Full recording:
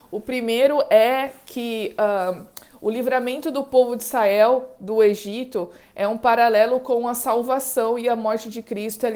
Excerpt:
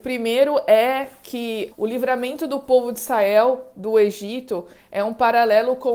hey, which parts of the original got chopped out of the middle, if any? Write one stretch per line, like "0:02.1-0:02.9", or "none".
0:01.9-0:02.8